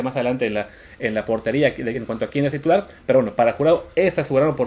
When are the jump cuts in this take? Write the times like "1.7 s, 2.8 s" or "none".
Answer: none